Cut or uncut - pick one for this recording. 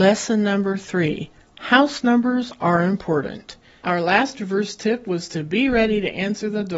cut